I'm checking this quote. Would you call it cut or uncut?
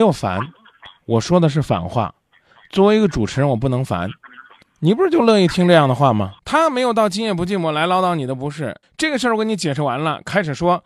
cut